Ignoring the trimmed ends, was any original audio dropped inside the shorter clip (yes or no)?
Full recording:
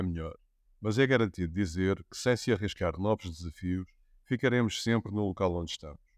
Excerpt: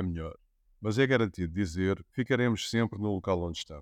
yes